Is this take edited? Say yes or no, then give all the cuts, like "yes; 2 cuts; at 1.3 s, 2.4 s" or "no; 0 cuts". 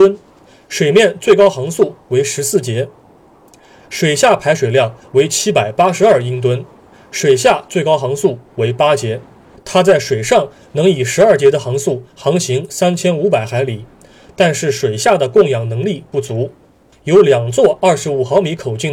yes; 2 cuts; at 9.6 s, 16.9 s